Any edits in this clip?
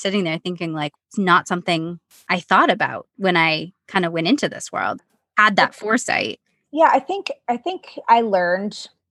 yes; 2 cuts; at 0.9 s, 5.0 s

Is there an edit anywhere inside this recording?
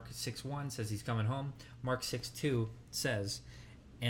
no; 0 cuts

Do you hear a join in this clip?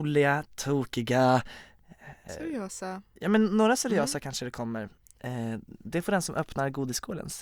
yes; 1 cut; at 2.3 s

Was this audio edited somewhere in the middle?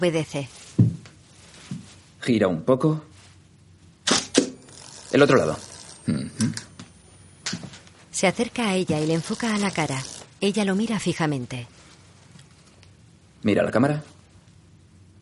no; 0 cuts

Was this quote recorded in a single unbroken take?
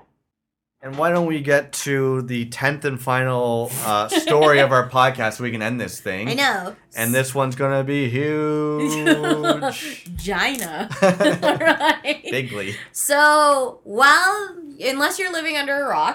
yes; 0 cuts

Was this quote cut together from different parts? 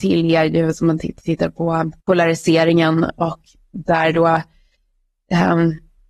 yes; 1 cut; at 2.0 s

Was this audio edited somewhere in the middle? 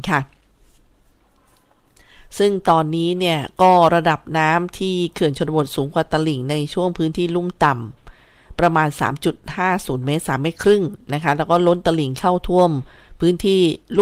no; 0 cuts

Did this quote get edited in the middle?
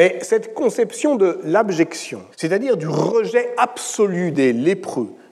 yes; 1 cut; at 2.3 s

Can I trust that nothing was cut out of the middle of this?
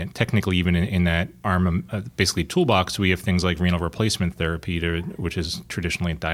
yes; 0 cuts

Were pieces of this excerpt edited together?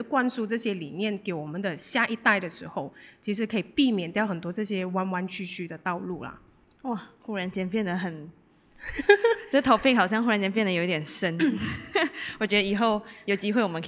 no; 0 cuts

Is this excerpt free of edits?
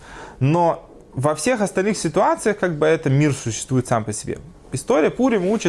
yes; 0 cuts

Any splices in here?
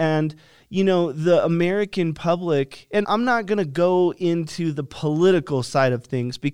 yes; 1 cut; at 3.0 s

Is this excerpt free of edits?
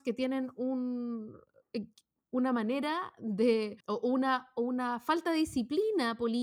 no; 1 cut; at 3.8 s

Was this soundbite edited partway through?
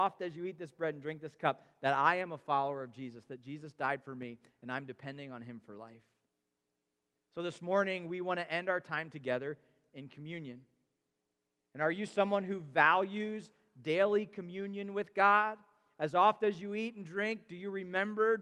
no; 0 cuts

